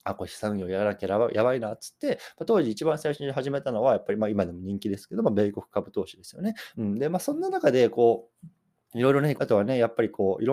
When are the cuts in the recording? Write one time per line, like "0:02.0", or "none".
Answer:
0:06.7
0:09.4